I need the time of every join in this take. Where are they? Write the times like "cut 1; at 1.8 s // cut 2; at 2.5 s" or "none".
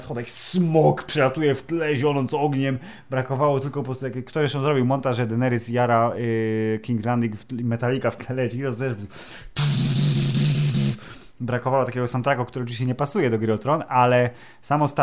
none